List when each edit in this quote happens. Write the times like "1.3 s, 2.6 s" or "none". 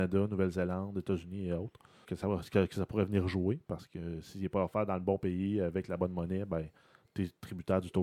2.0 s